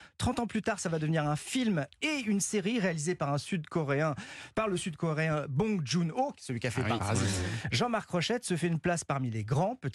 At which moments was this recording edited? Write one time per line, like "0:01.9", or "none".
0:07.0